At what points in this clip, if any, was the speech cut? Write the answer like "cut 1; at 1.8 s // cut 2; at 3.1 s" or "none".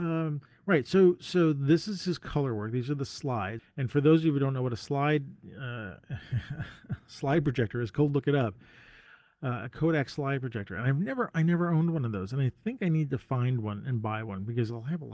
cut 1; at 3.6 s